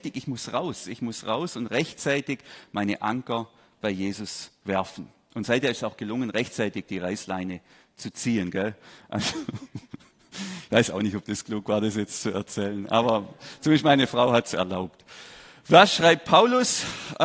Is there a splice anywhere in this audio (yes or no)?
no